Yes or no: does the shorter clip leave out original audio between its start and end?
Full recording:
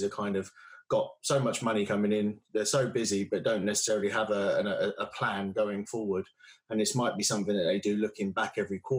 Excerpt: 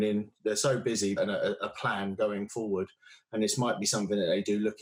yes